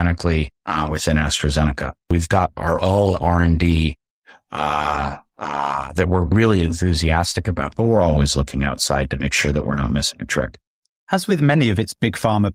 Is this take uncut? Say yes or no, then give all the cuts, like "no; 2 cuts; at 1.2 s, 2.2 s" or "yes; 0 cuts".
yes; 0 cuts